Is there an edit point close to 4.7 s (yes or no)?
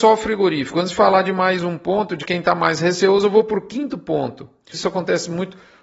yes